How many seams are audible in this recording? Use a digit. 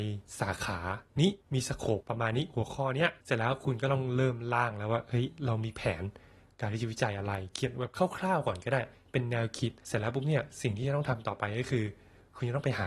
2